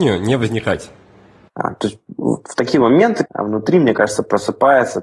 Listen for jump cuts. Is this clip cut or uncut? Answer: cut